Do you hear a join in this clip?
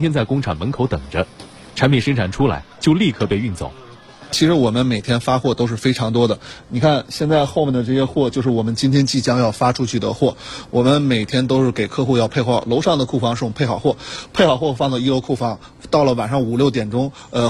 no; 0 cuts

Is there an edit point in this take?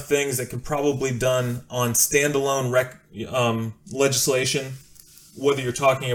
no; 0 cuts

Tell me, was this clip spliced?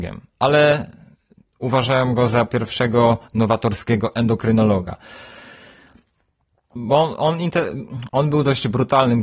yes; 2 cuts; at 6.8 s, 8.1 s

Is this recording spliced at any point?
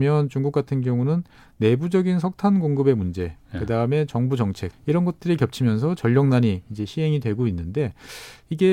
yes; 1 cut; at 4.7 s

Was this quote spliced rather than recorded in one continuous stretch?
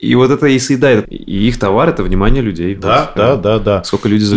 yes; 2 cuts; at 1.0 s, 3.2 s

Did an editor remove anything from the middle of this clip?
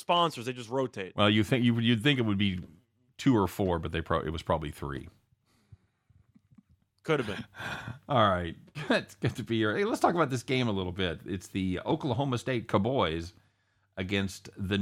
no; 0 cuts

